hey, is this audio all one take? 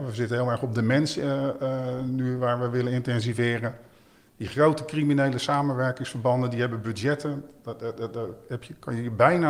yes; 0 cuts

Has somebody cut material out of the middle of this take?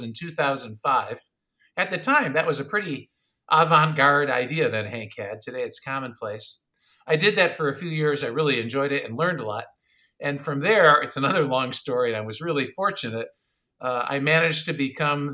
no; 0 cuts

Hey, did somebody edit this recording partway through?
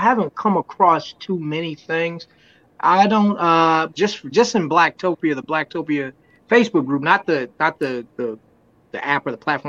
yes; 1 cut; at 3.9 s

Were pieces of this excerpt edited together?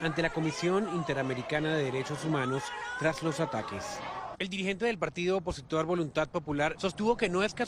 yes; 2 cuts; at 4.3 s, 6.7 s

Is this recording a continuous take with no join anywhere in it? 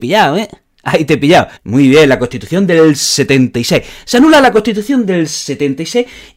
no; 1 cut; at 1.6 s

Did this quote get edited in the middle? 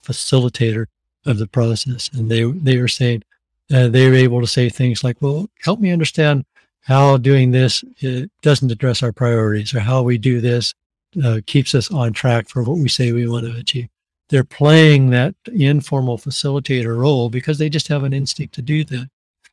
no; 0 cuts

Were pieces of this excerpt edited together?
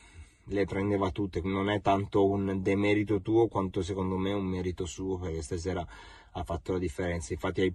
yes; 1 cut; at 1.4 s

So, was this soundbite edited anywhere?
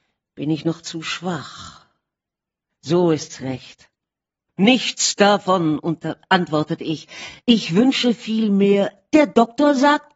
yes; 2 cuts; at 2.7 s, 4.5 s

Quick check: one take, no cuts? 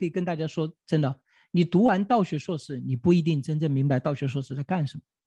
yes; 0 cuts

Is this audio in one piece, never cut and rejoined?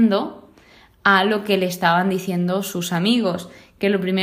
yes; 0 cuts

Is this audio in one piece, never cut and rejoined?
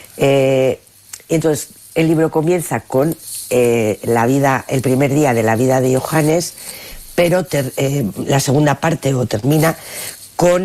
yes; 0 cuts

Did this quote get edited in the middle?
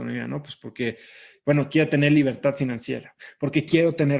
no; 0 cuts

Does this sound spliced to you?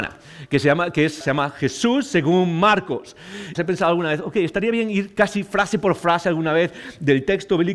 yes; 2 cuts; at 1.2 s, 3.5 s

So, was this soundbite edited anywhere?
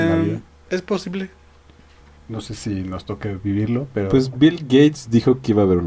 no; 0 cuts

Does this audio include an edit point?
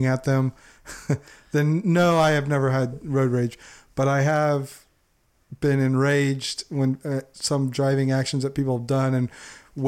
no; 0 cuts

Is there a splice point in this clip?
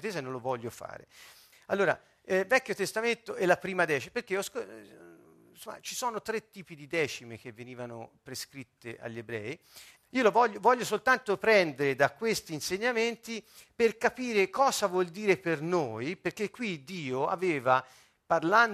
yes; 2 cuts; at 1.5 s, 10.0 s

